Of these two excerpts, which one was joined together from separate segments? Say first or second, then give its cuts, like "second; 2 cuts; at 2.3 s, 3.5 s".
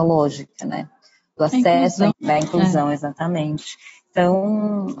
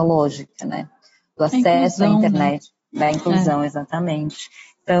first; 1 cut; at 2.1 s